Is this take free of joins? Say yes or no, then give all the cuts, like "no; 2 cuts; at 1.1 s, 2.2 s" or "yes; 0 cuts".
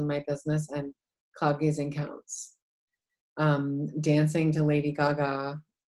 yes; 0 cuts